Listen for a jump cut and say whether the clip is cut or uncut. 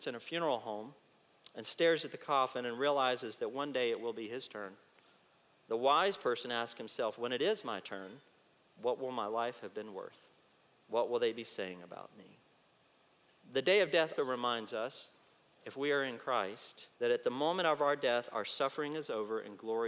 cut